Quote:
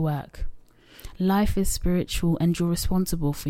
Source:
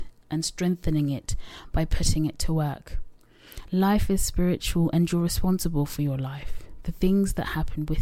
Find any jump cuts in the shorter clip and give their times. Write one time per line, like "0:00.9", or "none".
none